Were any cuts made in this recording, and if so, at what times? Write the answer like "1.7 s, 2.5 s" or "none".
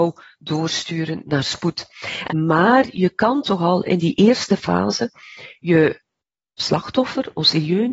2.3 s